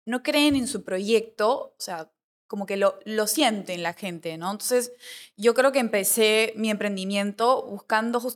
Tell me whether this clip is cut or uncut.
uncut